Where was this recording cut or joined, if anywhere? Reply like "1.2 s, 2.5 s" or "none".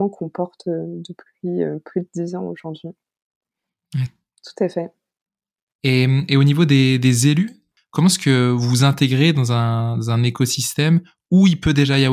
4.1 s